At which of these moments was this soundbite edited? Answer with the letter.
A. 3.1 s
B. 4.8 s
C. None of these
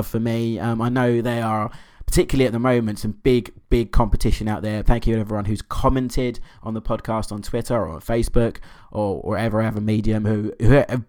B